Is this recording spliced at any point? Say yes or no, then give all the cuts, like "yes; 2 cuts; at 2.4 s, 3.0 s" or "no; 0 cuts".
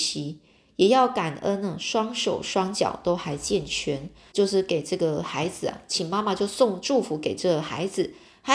yes; 1 cut; at 4.3 s